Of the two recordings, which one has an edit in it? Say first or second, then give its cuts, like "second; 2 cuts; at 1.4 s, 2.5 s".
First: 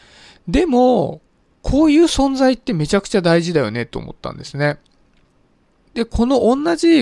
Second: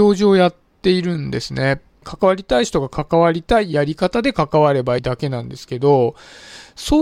second; 2 cuts; at 2.0 s, 5.0 s